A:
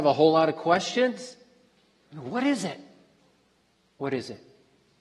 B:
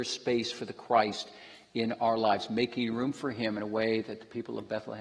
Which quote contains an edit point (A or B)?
A